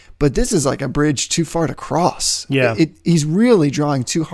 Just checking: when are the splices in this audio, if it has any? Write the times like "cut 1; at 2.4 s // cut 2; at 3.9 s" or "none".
none